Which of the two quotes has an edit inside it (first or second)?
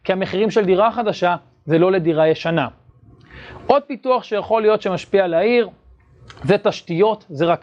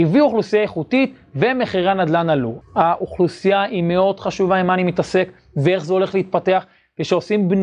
second